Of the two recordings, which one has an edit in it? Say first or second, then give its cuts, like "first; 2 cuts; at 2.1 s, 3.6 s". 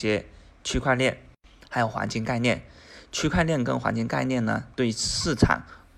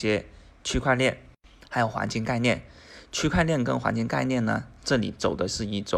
first; 1 cut; at 4.7 s